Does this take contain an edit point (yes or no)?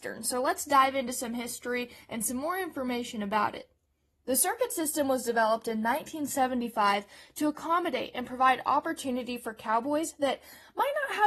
no